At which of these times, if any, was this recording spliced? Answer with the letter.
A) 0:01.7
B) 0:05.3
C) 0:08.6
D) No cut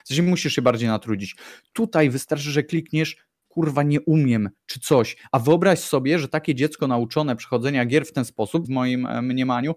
C